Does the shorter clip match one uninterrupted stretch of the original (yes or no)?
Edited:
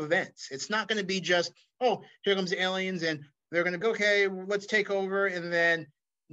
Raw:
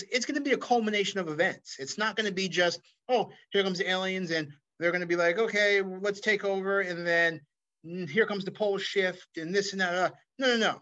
no